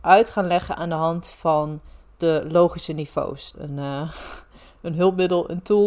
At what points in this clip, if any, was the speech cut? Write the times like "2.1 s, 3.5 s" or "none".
3.5 s